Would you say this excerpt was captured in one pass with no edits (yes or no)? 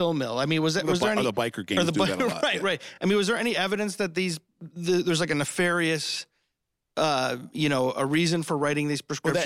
yes